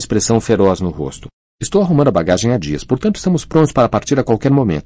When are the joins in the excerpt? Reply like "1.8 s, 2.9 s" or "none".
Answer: none